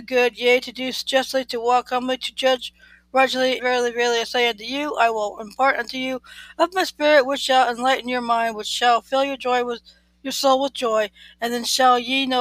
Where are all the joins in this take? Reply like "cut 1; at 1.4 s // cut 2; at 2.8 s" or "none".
cut 1; at 3.6 s